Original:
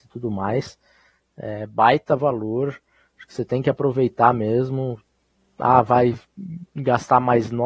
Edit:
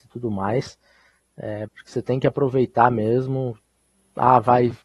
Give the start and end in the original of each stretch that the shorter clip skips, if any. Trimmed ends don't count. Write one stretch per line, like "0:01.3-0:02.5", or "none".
0:01.7-0:03.1